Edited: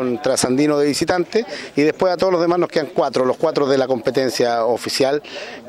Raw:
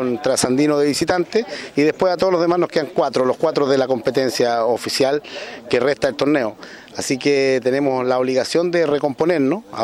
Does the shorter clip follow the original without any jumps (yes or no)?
yes